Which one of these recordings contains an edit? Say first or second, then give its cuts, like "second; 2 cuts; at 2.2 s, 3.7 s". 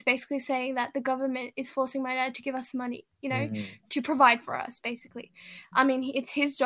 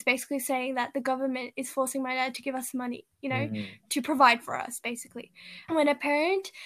second; 1 cut; at 5.7 s